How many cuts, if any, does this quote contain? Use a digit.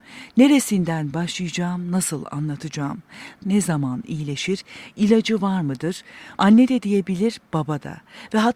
2